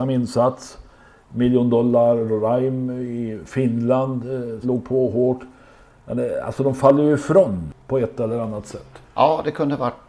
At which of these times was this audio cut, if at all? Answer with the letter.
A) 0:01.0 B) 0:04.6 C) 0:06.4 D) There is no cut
B